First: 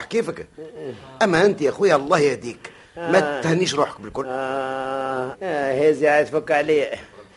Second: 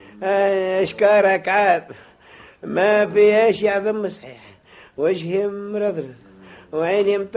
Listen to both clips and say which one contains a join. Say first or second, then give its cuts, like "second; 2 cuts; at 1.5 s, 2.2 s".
first; 1 cut; at 5.3 s